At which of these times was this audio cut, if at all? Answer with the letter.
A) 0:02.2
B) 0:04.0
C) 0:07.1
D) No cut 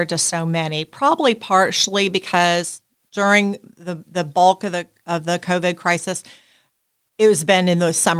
D